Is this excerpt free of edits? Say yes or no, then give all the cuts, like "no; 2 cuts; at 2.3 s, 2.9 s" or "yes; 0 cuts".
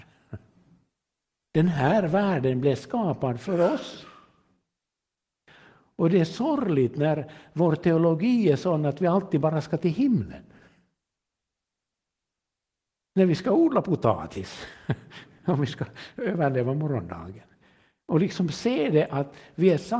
yes; 0 cuts